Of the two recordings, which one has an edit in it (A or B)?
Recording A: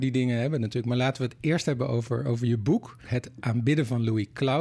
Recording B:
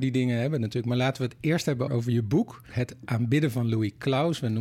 B